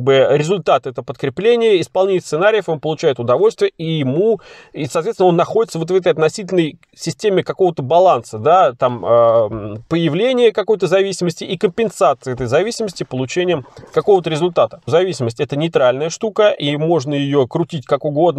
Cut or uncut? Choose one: uncut